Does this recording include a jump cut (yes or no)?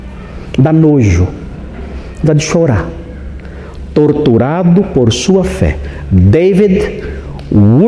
no